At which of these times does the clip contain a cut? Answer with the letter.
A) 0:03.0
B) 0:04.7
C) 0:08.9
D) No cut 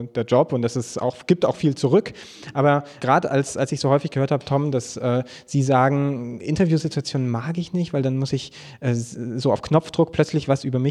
A